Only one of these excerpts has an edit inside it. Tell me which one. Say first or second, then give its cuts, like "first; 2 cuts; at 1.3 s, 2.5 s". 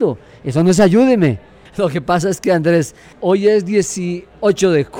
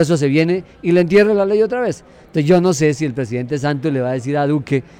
first; 2 cuts; at 1.7 s, 3.1 s